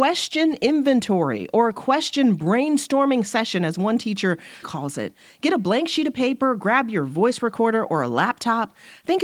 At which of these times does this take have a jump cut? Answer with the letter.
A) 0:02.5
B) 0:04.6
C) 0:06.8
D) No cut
B